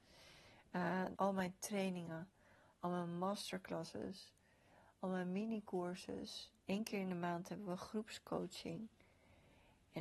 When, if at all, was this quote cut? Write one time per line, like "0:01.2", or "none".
0:01.1
0:06.6